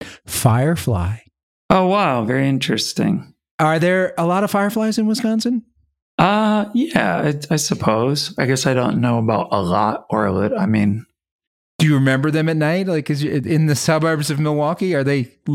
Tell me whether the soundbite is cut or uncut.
uncut